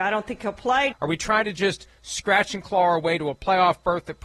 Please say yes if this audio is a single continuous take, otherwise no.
no